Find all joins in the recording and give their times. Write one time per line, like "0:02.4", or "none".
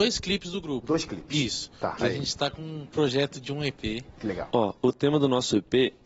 0:02.0
0:04.5